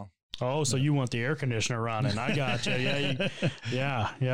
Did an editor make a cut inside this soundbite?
no; 0 cuts

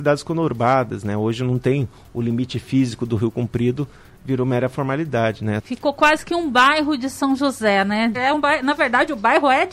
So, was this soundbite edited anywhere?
yes; 2 cuts; at 5.6 s, 8.1 s

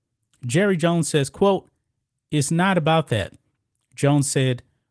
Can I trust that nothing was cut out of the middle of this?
yes; 0 cuts

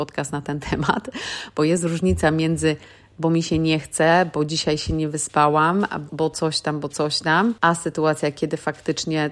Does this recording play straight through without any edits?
no; 2 cuts; at 6.1 s, 7.6 s

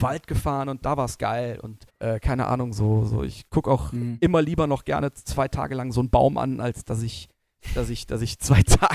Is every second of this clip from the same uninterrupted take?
no; 1 cut; at 1.9 s

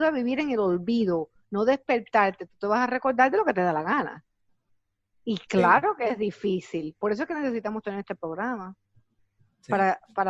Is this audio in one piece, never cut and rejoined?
yes; 0 cuts

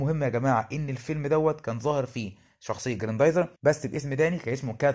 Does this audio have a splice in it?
yes; 1 cut; at 3.6 s

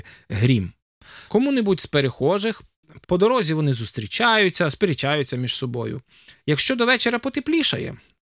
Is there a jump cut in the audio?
yes; 3 cuts; at 1.3 s, 3.0 s, 6.3 s

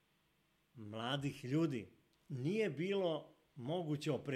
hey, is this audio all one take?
no; 1 cut; at 2.1 s

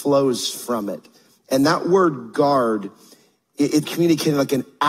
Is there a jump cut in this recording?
yes; 1 cut; at 3.8 s

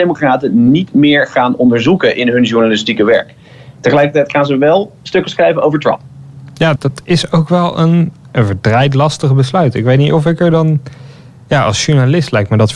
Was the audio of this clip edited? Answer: yes; 1 cut; at 6.8 s

